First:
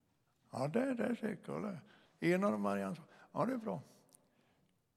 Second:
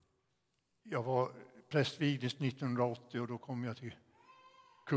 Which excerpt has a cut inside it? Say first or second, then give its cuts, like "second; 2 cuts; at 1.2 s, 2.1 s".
first; 1 cut; at 2.1 s